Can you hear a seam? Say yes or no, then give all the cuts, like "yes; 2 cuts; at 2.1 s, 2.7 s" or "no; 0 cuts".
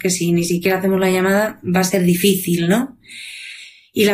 no; 0 cuts